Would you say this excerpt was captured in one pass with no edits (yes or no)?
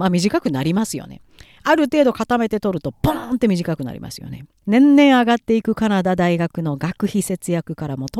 no